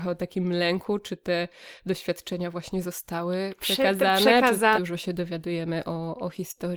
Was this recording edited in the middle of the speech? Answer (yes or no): yes